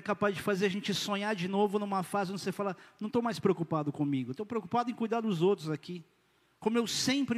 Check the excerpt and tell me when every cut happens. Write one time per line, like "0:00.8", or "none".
none